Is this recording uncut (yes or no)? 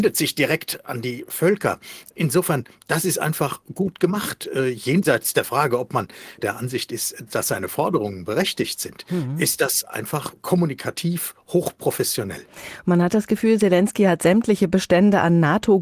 yes